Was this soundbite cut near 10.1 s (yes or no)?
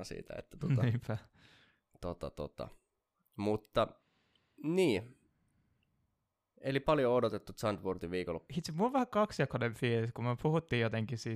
no